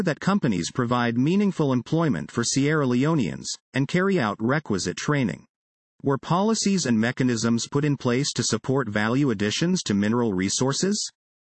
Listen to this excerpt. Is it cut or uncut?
cut